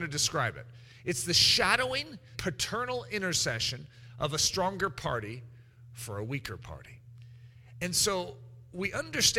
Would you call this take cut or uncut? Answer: cut